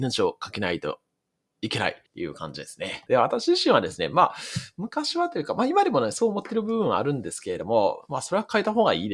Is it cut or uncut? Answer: cut